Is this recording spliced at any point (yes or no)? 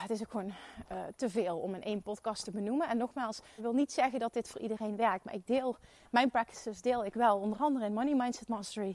yes